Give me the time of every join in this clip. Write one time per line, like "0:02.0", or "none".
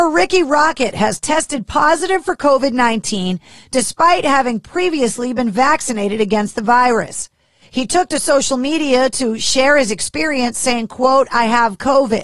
none